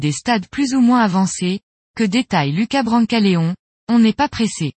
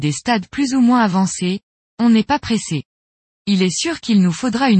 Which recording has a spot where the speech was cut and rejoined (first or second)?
second